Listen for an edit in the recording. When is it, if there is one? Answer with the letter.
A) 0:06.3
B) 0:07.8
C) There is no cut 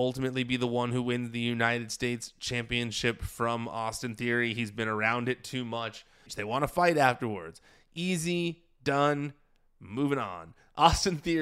A